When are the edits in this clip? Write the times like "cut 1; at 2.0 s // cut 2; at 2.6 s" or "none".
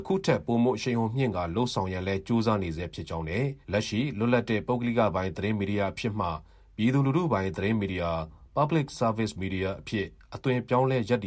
cut 1; at 3.6 s